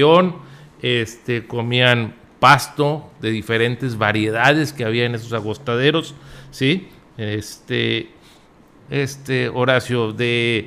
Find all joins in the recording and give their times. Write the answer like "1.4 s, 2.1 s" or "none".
8.9 s